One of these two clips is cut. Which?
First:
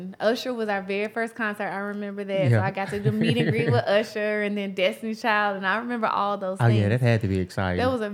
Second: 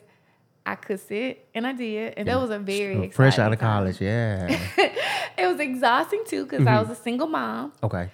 second; 1 cut; at 2.3 s

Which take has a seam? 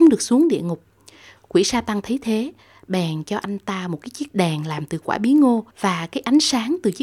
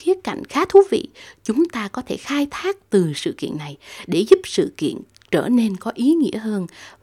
first; 1 cut; at 5.7 s

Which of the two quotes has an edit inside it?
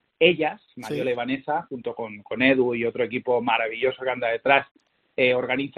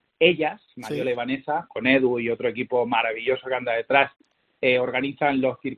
second; 1 cut; at 1.7 s

